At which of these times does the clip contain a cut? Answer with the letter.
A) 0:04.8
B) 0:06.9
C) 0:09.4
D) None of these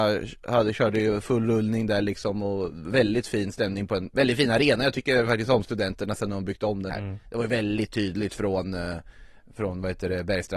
B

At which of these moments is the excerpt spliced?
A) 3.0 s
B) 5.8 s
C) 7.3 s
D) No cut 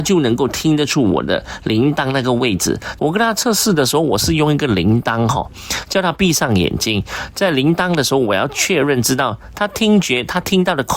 A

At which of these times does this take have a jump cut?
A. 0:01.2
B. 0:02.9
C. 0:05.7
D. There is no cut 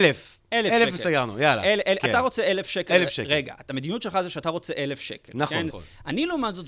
C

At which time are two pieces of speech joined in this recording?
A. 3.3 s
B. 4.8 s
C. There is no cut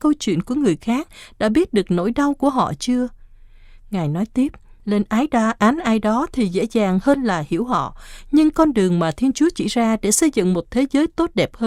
B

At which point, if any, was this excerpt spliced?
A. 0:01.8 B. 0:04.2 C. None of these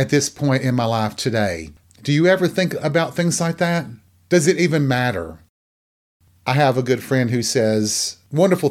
A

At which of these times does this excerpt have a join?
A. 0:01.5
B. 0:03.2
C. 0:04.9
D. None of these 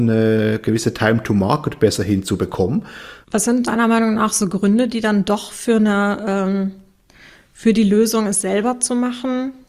B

